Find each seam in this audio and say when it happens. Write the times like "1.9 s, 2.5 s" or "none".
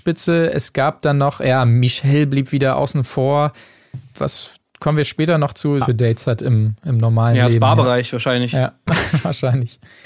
4.1 s, 5.8 s